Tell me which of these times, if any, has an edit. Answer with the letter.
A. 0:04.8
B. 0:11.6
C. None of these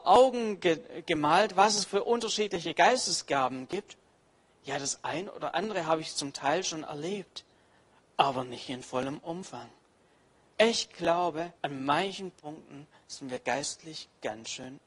B